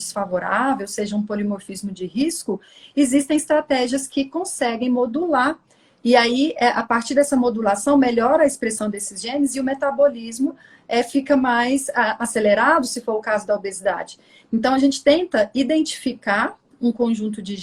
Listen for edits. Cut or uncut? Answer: uncut